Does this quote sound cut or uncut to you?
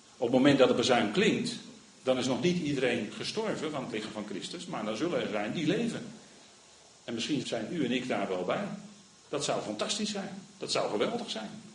cut